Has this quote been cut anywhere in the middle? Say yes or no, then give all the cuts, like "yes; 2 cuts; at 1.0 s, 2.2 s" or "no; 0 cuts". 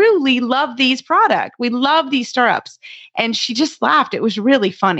no; 0 cuts